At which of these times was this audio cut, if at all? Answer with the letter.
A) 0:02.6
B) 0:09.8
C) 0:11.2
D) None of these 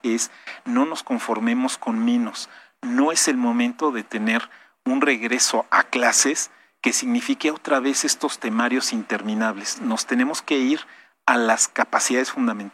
D